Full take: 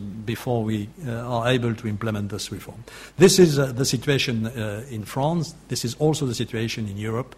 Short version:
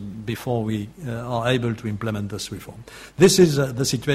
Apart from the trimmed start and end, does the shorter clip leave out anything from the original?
no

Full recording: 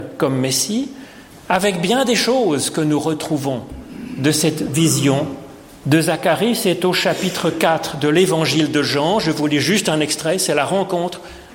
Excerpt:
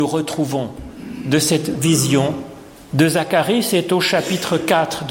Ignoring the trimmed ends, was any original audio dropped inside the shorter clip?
no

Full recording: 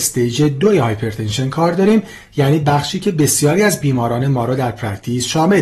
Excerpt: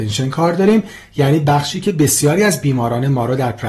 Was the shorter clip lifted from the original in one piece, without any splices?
yes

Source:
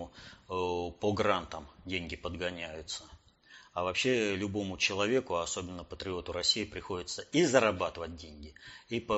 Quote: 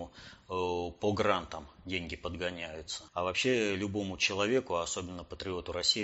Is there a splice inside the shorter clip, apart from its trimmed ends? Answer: yes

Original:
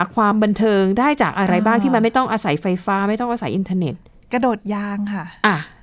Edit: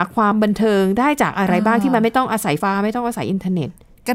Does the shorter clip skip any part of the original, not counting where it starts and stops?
yes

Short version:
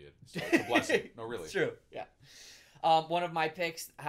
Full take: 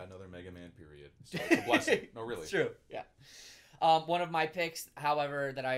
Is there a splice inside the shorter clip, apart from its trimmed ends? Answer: no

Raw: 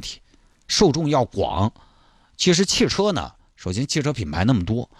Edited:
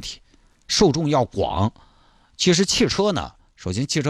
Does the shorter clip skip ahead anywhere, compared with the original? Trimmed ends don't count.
no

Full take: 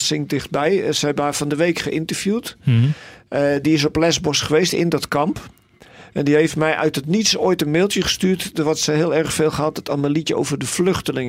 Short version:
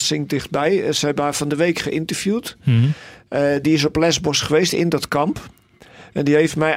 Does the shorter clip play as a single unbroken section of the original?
yes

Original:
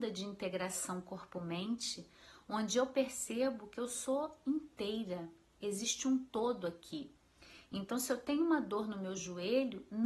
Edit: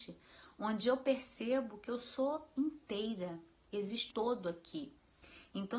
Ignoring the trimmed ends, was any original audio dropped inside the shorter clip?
yes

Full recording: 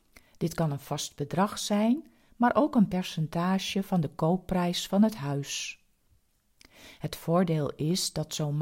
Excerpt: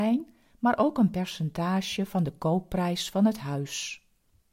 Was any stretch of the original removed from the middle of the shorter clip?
no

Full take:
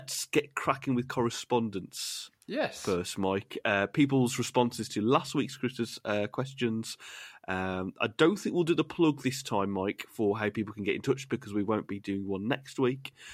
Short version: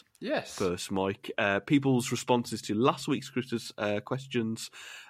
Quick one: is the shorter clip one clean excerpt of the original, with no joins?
yes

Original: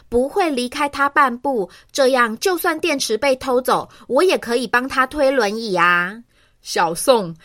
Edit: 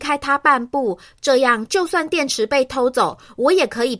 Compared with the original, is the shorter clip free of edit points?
yes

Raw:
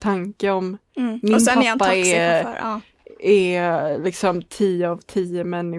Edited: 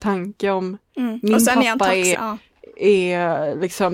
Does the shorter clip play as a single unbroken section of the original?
no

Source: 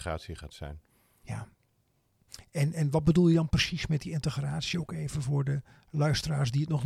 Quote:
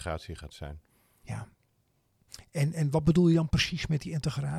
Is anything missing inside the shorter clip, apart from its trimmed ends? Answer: no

